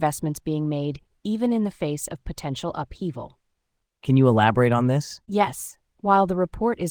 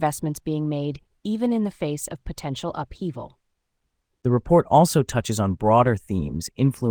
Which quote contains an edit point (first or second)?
first